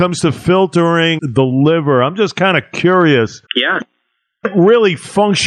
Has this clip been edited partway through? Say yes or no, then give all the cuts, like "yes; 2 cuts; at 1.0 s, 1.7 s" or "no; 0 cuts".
yes; 2 cuts; at 1.2 s, 3.5 s